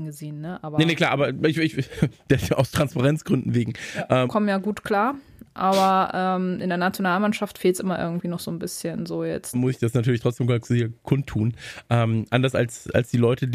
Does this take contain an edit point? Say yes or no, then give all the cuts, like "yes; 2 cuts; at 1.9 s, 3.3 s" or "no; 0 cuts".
yes; 3 cuts; at 4.3 s, 9.5 s, 10.6 s